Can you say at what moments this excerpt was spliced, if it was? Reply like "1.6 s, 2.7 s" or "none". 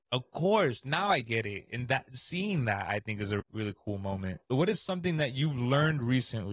4.5 s